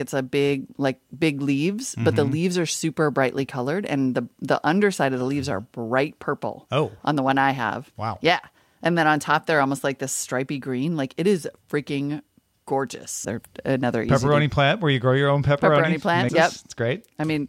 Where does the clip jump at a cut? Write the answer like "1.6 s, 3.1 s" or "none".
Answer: 13.2 s, 16.3 s

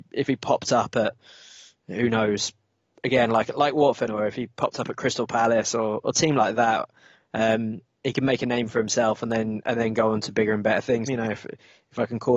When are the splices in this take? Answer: 4.1 s, 11.1 s

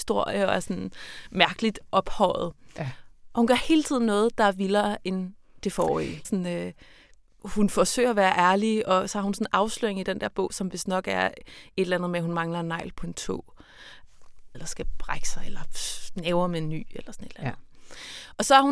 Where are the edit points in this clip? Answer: 6.2 s, 14.5 s

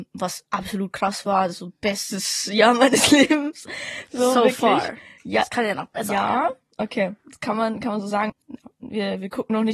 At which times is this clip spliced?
8.3 s

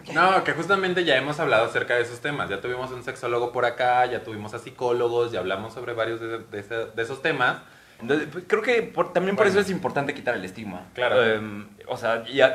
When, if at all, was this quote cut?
8.0 s

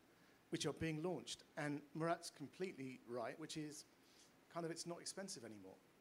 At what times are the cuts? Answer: 3.4 s

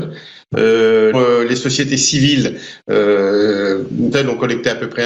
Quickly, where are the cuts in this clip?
1.1 s, 4.1 s

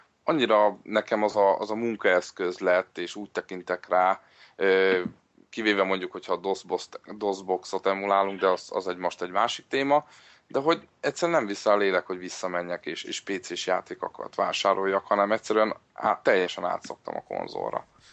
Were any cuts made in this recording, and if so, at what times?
13.0 s

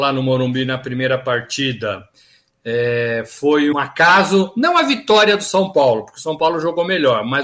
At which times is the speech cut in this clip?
3.7 s

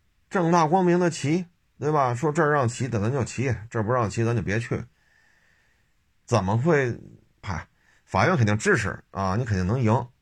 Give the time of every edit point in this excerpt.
7.4 s

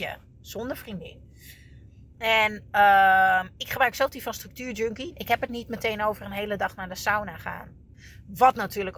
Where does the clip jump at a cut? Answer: 2.1 s, 5.1 s

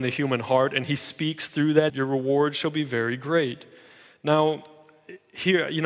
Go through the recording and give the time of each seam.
1.9 s

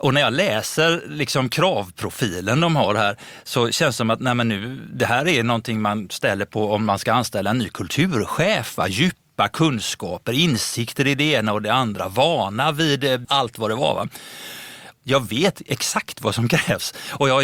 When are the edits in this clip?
13.2 s, 14.9 s

